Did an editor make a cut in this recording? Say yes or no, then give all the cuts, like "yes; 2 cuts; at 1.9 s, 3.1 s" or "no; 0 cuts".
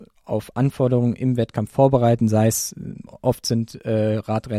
no; 0 cuts